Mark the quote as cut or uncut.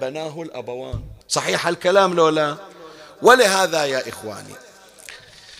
cut